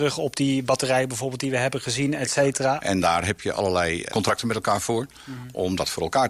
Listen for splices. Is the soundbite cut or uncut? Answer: cut